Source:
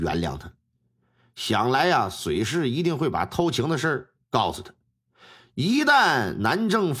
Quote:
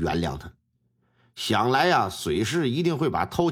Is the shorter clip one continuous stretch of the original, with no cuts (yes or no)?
yes